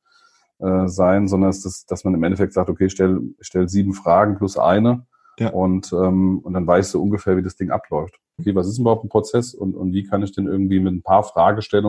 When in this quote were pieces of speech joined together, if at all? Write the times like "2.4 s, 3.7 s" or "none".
8.4 s